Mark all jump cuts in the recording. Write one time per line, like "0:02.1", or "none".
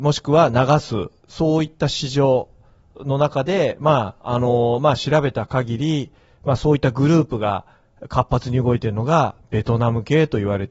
none